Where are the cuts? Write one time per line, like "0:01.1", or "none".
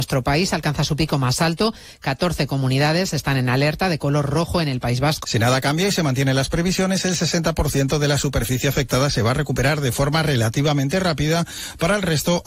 0:05.2